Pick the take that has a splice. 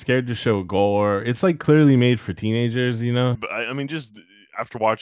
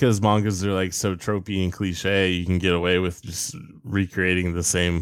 first; 1 cut; at 3.3 s

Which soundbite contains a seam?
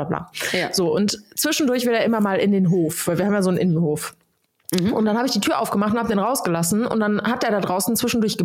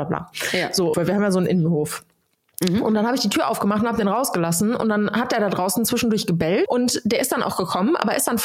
second; 2 cuts; at 0.9 s, 6.7 s

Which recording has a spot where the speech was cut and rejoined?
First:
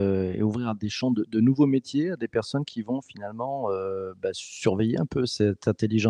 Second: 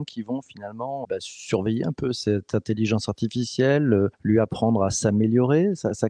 second; 1 cut; at 1.0 s

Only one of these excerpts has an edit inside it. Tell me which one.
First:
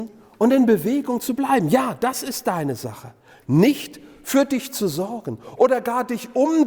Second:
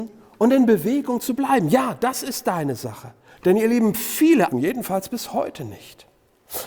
second; 2 cuts; at 3.4 s, 4.5 s

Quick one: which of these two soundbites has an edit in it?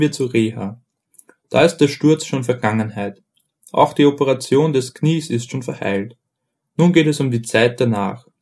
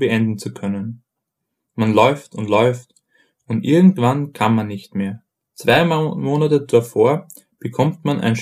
second; 1 cut; at 5.4 s

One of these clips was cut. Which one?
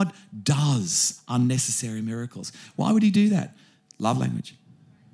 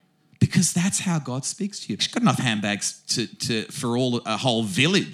second; 1 cut; at 2.0 s

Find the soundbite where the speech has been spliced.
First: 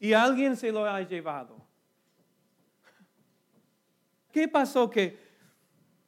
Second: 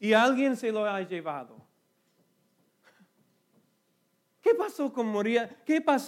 first; 1 cut; at 4.3 s

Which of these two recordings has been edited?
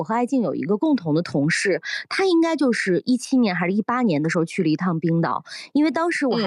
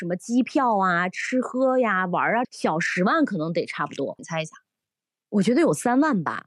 second; 2 cuts; at 2.4 s, 4.2 s

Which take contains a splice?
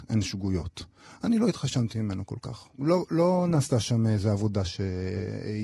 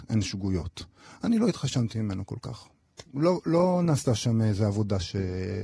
first; 1 cut; at 2.7 s

